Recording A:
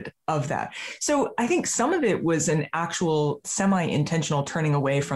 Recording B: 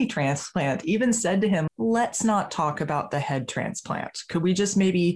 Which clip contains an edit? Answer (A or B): B